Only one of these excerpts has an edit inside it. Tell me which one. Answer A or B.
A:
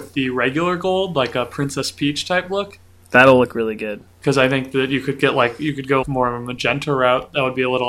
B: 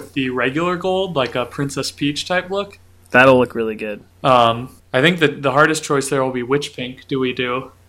A